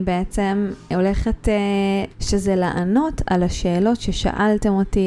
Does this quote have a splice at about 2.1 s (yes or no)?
yes